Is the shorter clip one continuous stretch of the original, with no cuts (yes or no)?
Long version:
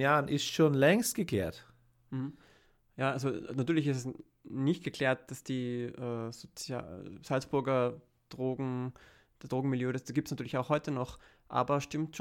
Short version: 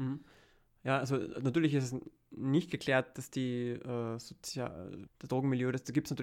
no